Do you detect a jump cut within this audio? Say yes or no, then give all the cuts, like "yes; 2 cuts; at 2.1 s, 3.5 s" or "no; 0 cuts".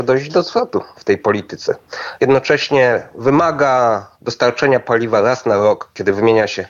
yes; 1 cut; at 2.2 s